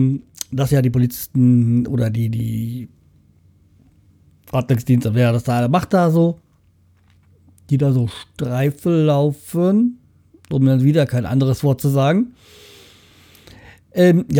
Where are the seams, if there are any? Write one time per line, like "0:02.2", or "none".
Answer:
none